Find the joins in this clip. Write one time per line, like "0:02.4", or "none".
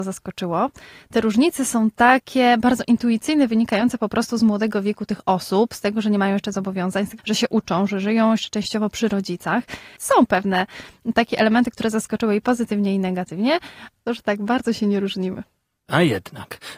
0:07.2
0:10.0
0:14.1